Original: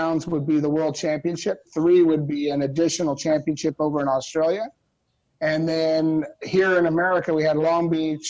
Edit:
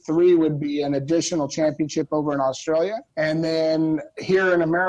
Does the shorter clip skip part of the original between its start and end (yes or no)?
yes